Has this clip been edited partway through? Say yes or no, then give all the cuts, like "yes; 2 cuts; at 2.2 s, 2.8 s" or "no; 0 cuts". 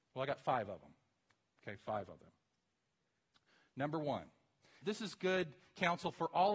yes; 1 cut; at 4.8 s